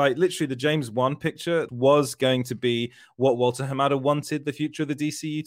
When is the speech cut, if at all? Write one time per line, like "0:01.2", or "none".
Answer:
0:01.7